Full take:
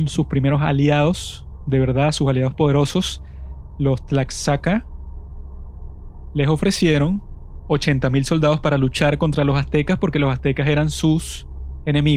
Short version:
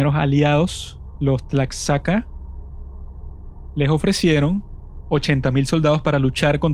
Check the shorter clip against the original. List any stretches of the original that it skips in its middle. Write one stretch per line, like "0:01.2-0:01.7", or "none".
0:01.6-0:03.8

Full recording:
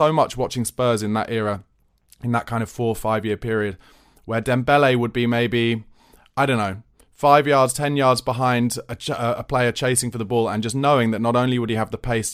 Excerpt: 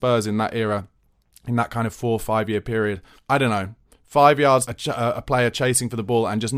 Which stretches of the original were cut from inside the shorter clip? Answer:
0:03.9-0:06.3
0:07.7-0:08.9

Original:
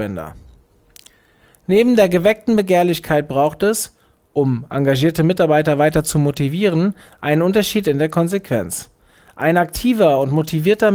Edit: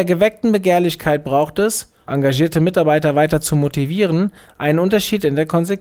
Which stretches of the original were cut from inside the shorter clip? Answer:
0:04.1-0:04.7

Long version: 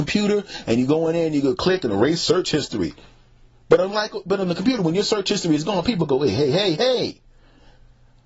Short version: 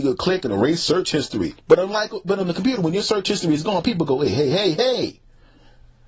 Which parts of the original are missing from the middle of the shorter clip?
0:03.0-0:03.6

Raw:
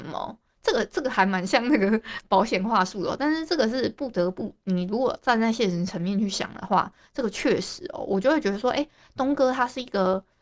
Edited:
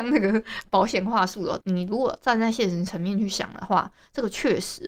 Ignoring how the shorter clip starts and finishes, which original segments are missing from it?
0:03.2-0:04.6

